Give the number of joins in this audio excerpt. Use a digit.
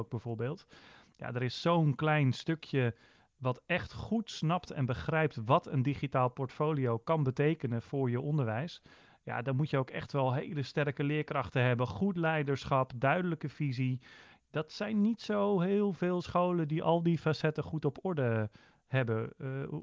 0